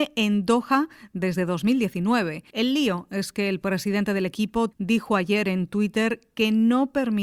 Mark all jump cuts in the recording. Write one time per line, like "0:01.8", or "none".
0:02.5
0:04.7